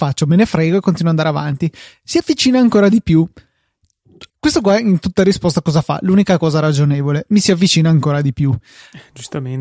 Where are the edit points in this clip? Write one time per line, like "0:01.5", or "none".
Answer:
0:04.3

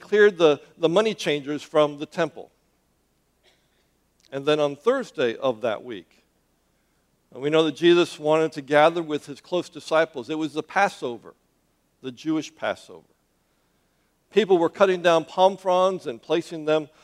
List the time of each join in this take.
0:14.2

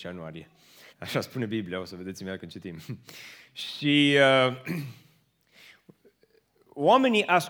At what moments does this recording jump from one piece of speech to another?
0:00.9

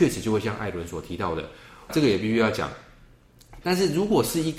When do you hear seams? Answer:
0:01.9
0:03.6

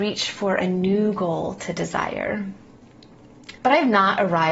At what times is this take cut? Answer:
0:03.6

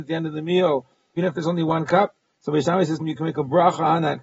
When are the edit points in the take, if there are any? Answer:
0:01.2
0:03.0

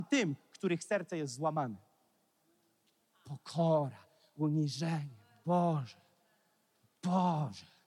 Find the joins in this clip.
none

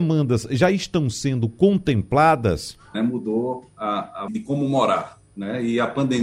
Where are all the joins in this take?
0:02.9
0:04.3

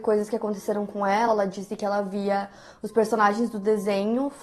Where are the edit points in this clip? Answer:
none

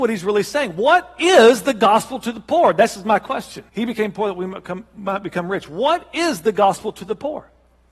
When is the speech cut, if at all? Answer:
0:03.7

